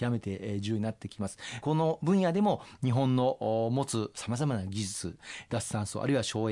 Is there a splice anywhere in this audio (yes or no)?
no